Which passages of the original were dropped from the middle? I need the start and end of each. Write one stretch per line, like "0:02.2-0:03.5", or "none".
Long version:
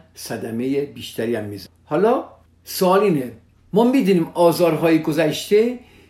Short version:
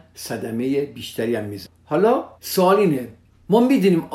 0:02.4-0:02.6